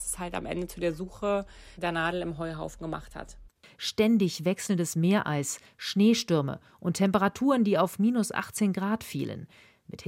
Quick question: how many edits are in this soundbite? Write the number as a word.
one